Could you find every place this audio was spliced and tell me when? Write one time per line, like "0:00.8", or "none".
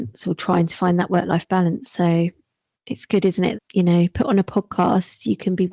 0:03.5